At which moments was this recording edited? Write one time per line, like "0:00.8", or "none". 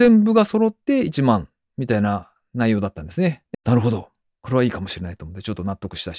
0:03.5